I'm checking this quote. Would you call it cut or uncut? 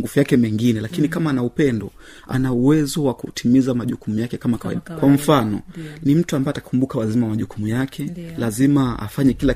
cut